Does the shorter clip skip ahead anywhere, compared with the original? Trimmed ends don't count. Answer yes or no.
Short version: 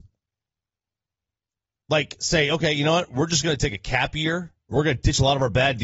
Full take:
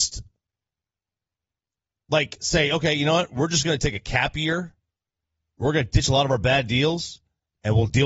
yes